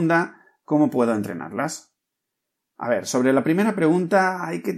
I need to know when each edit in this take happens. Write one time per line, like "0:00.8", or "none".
none